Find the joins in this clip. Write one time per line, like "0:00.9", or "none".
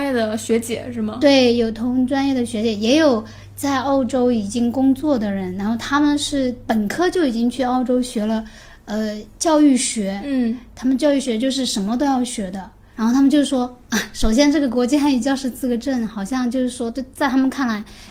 0:12.9